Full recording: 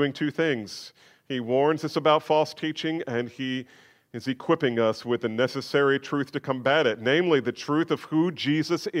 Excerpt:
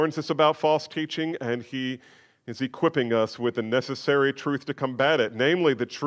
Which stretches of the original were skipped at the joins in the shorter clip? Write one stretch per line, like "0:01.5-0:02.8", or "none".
none